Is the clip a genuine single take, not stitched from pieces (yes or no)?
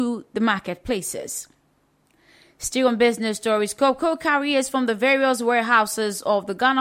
yes